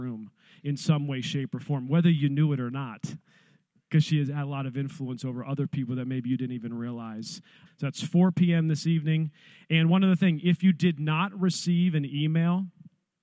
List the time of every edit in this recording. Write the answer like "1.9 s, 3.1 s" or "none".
7.7 s